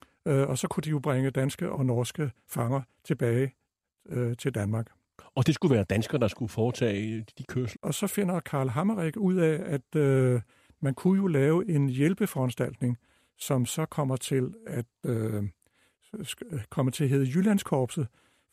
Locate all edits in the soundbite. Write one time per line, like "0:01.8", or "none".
0:07.8